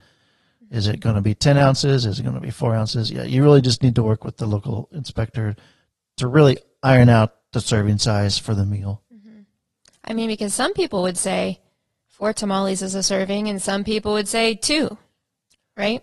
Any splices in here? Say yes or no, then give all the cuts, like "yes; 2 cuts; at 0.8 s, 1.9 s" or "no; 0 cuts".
no; 0 cuts